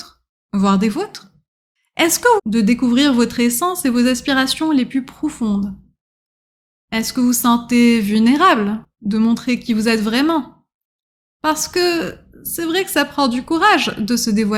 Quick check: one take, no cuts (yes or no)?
no